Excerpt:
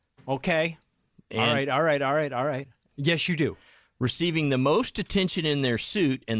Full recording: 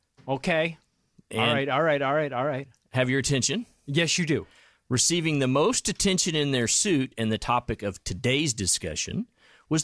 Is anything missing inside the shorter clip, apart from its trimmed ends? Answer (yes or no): yes